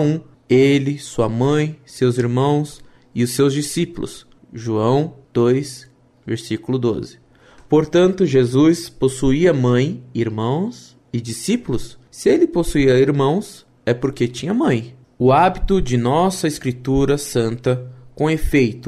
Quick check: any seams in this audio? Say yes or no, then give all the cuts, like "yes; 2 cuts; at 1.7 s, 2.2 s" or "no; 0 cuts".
no; 0 cuts